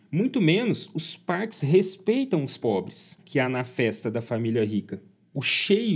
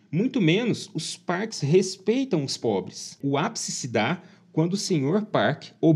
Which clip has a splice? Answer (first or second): first